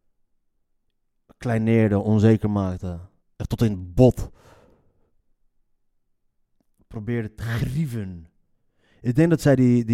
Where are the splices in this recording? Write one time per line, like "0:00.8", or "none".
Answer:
none